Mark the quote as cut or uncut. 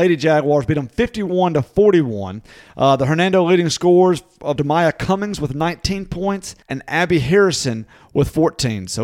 cut